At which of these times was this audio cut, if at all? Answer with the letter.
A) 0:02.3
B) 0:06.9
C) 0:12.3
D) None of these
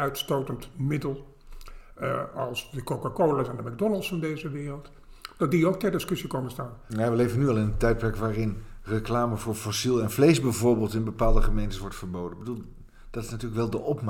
B